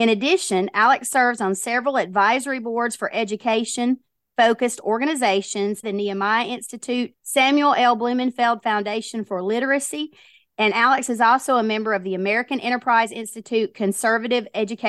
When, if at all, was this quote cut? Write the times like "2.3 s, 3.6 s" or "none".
5.8 s, 7.1 s

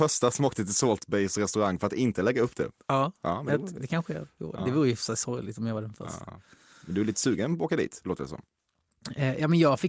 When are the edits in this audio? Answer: none

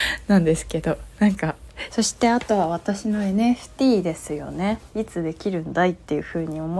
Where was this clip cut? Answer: 1.9 s

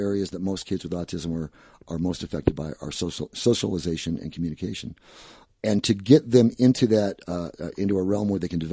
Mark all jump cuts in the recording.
none

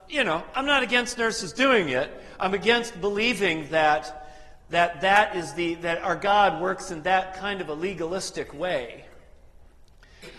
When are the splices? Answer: none

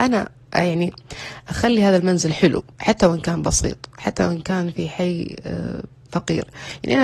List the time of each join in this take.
2.7 s

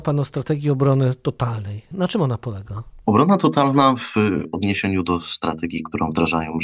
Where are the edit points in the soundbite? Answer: 1.9 s

